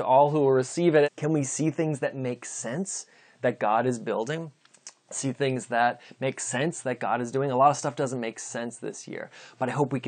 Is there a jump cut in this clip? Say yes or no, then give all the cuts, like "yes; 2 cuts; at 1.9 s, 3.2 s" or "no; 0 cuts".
yes; 1 cut; at 1.0 s